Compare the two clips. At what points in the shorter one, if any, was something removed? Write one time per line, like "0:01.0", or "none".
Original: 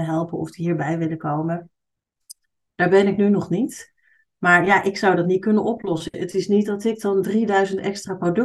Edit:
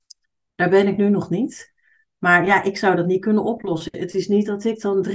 none